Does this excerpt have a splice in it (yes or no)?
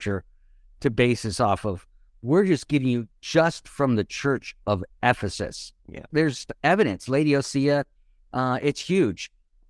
yes